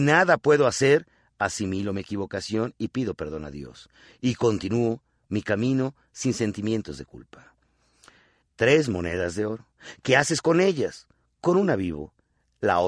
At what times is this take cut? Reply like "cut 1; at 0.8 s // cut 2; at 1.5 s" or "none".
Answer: cut 1; at 8.4 s